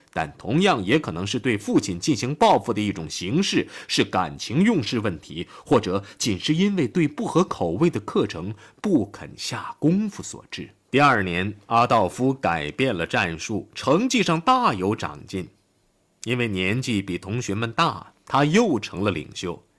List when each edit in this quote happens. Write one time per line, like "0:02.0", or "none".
none